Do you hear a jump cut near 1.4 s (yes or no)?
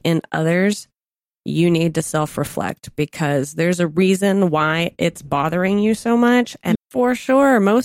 no